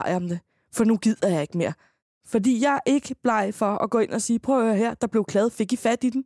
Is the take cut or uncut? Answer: uncut